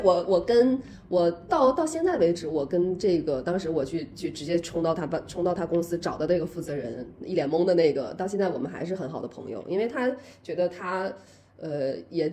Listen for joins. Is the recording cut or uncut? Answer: uncut